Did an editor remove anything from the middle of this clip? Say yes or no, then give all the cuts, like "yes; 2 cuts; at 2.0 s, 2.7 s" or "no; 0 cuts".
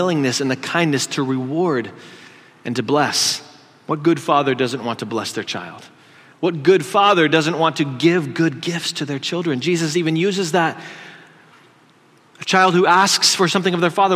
no; 0 cuts